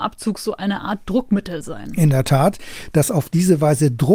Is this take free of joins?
no; 1 cut; at 2.9 s

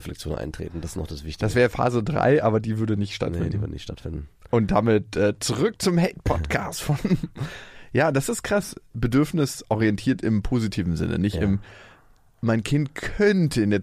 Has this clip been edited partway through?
no; 0 cuts

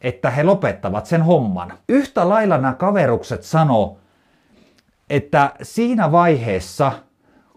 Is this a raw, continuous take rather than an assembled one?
no; 1 cut; at 1.8 s

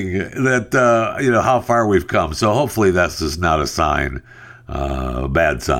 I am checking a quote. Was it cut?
no; 0 cuts

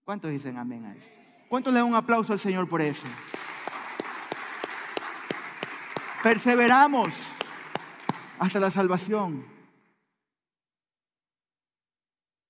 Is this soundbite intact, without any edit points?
yes; 0 cuts

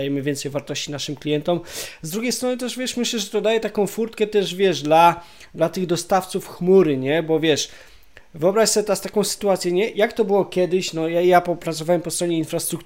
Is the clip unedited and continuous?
yes; 0 cuts

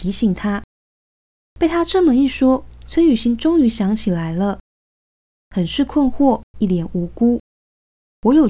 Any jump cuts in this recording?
yes; 2 cuts; at 5.3 s, 6.5 s

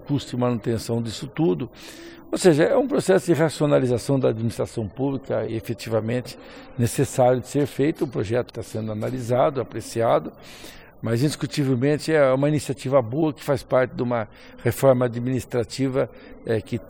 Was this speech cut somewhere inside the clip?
yes; 2 cuts; at 5.5 s, 8.5 s

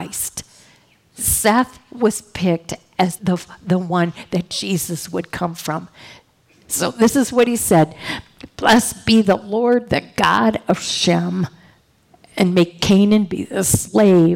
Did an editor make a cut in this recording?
yes; 1 cut; at 3.2 s

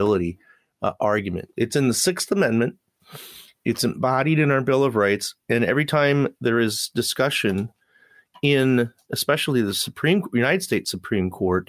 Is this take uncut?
no; 1 cut; at 1.5 s

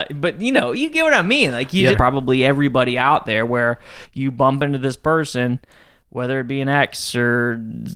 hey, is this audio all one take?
no; 1 cut; at 1.9 s

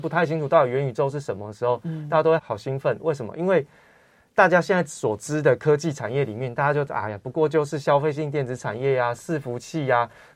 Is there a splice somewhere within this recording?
yes; 1 cut; at 2.4 s

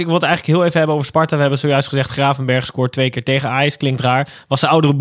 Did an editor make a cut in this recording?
no; 0 cuts

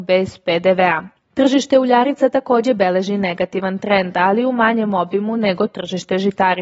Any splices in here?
no; 0 cuts

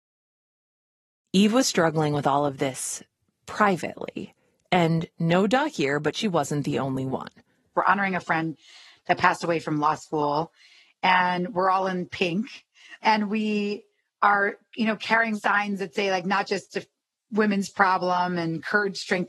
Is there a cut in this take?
yes; 1 cut; at 7.7 s

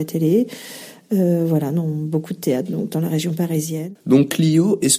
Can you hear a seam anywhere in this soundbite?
no; 0 cuts

